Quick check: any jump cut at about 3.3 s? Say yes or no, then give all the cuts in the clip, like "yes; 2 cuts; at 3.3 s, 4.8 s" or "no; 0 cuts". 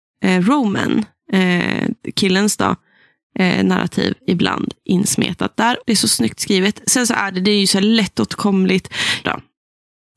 no; 2 cuts; at 5.8 s, 9.2 s